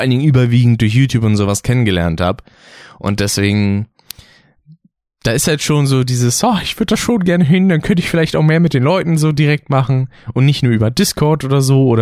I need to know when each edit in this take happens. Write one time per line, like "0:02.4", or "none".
none